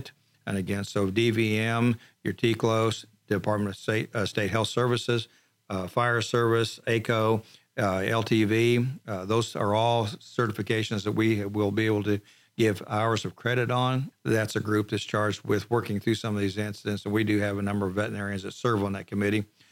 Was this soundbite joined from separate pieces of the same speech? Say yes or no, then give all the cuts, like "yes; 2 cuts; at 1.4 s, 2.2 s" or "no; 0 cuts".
yes; 1 cut; at 14.1 s